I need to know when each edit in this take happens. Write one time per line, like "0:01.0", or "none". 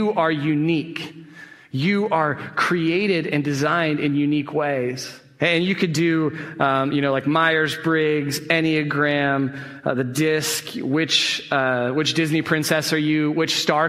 0:05.4